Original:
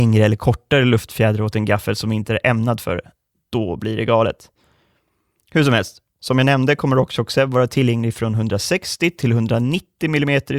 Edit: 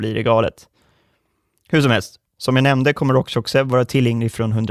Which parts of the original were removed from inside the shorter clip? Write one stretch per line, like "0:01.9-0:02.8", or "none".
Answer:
none